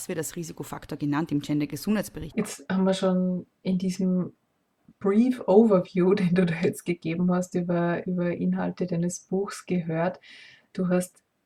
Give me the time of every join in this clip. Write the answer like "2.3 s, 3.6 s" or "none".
2.3 s